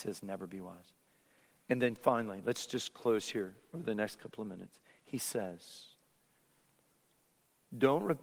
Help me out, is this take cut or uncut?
uncut